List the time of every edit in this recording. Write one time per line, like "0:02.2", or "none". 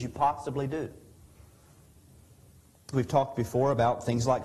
0:02.9